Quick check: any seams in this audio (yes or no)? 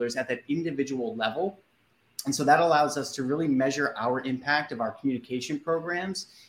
no